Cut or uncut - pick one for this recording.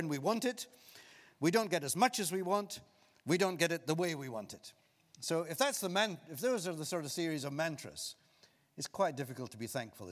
uncut